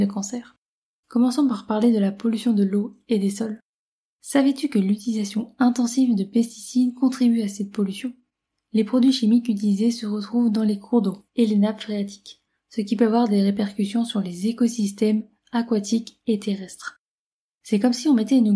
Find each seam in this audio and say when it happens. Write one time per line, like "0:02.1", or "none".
0:01.0